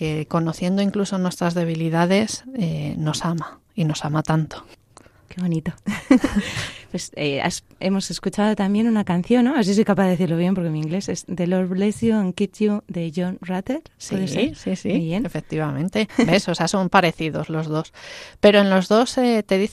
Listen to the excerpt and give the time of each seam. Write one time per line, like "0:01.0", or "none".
0:16.1

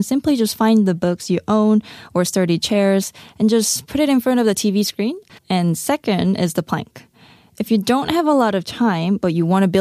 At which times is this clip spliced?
0:05.4

